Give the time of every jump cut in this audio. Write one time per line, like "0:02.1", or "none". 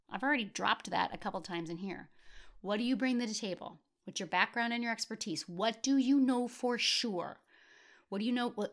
none